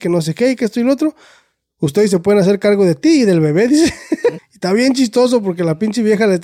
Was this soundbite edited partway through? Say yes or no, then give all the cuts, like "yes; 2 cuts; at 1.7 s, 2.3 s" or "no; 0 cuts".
yes; 1 cut; at 4.4 s